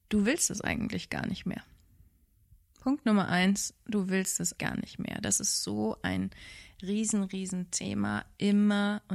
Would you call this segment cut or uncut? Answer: cut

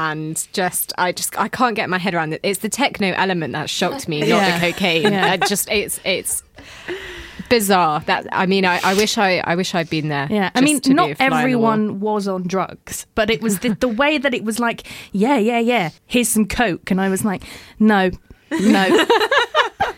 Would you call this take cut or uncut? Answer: cut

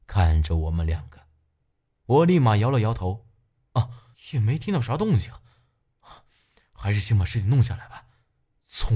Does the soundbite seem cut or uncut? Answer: cut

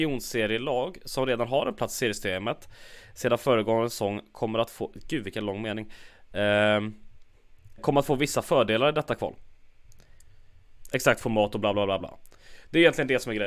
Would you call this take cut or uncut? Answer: cut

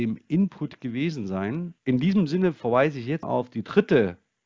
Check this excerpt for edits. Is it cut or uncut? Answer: cut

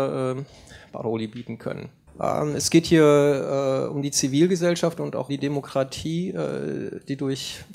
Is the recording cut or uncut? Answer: cut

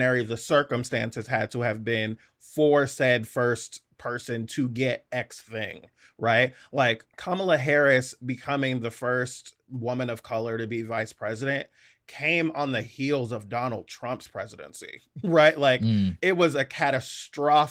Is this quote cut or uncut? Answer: uncut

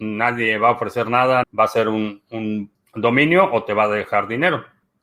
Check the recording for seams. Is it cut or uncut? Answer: cut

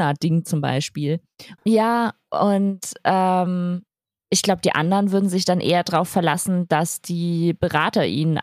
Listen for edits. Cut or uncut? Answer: cut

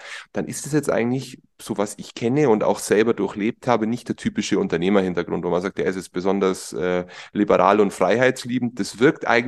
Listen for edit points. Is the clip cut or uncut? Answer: uncut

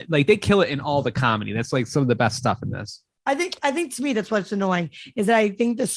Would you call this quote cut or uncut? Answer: uncut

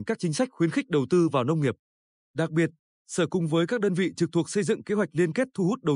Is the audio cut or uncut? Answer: uncut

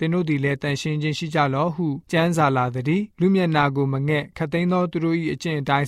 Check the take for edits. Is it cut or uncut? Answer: cut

